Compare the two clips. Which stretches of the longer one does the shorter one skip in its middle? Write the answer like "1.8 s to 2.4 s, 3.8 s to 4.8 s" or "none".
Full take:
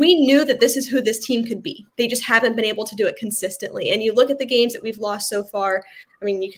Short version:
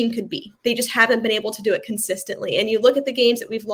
none